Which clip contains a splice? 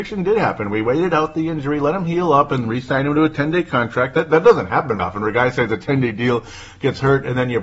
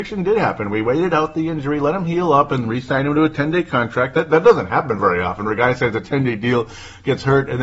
first; 1 cut; at 5.0 s

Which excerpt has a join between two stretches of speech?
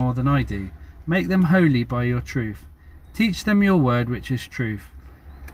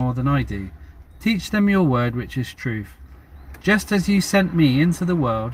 second; 1 cut; at 1.0 s

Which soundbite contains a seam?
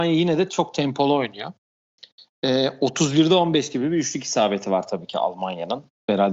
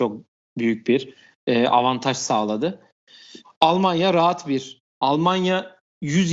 second; 2 cuts; at 3.4 s, 4.8 s

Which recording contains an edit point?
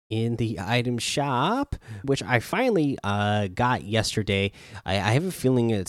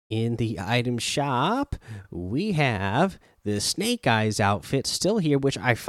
first; 1 cut; at 2.0 s

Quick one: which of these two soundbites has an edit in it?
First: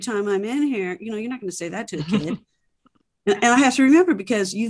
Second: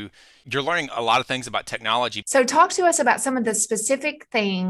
second; 1 cut; at 2.2 s

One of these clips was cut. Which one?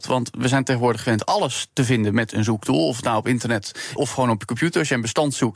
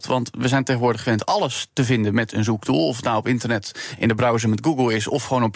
first; 1 cut; at 4.0 s

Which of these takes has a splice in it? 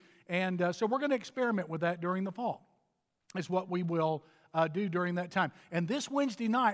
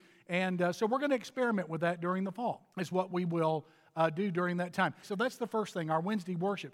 second; 2 cuts; at 2.7 s, 5.0 s

